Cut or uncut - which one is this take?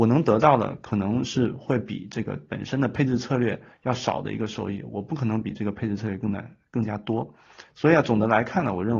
cut